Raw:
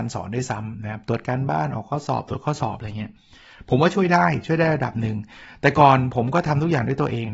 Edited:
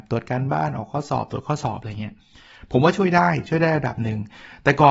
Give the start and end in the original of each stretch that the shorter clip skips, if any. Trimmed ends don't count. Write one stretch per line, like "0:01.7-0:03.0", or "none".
none